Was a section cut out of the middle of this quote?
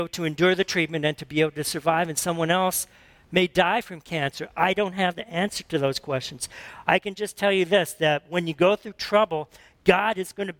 no; 0 cuts

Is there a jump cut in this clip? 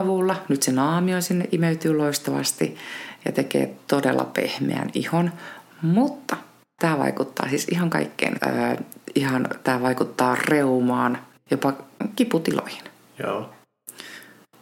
yes; 2 cuts; at 8.4 s, 11.4 s

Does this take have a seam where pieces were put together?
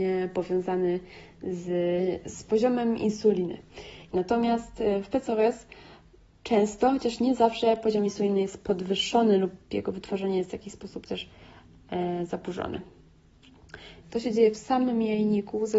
yes; 2 cuts; at 4.1 s, 14.0 s

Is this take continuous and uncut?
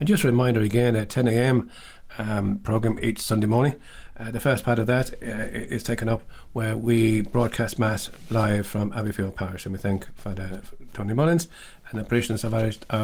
yes; 0 cuts

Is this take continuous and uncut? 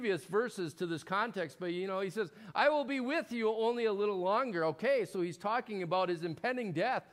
yes; 0 cuts

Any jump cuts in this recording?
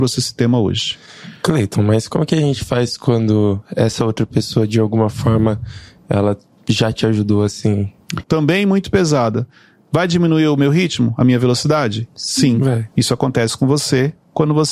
yes; 2 cuts; at 8.2 s, 12.9 s

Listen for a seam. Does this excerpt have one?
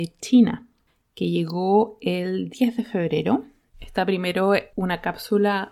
yes; 1 cut; at 3.7 s

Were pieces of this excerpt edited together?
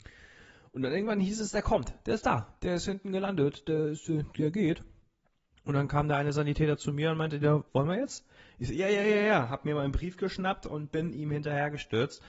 yes; 1 cut; at 7.7 s

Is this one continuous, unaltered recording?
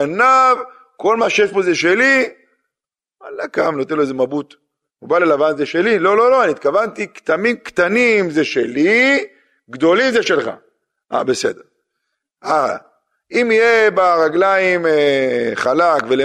no; 1 cut; at 4.9 s

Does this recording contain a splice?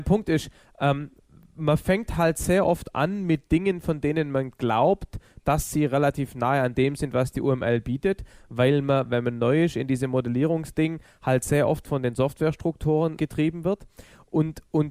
yes; 1 cut; at 13.2 s

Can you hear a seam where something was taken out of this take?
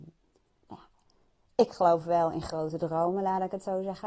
no; 0 cuts

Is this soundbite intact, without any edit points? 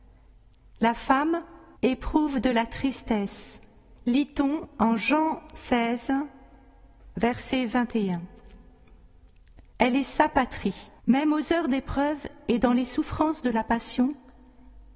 no; 3 cuts; at 1.7 s, 9.7 s, 11.0 s

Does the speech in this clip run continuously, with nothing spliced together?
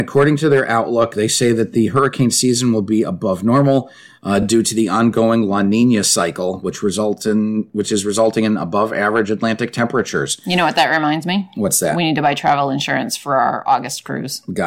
yes; 0 cuts

